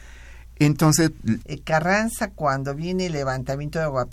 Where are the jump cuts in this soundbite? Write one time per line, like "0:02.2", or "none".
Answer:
0:01.4